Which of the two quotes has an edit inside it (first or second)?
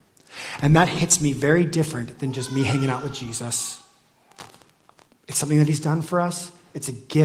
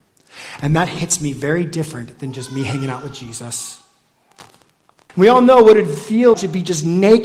second